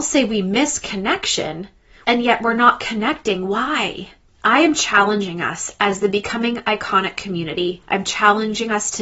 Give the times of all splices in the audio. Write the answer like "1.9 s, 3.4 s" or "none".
2.0 s